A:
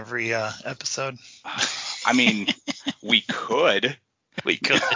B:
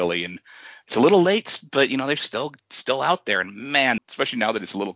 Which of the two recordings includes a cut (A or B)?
B